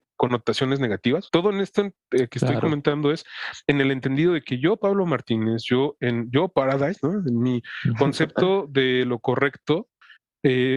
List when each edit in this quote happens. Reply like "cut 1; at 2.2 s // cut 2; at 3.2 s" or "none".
cut 1; at 1.3 s